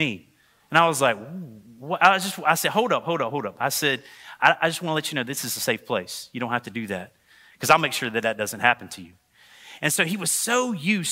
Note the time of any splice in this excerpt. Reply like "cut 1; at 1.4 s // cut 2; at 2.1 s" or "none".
none